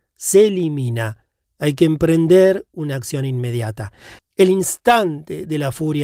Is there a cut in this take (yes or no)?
yes